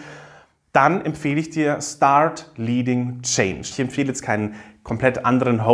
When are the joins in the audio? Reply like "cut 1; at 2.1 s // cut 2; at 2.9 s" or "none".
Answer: cut 1; at 3.7 s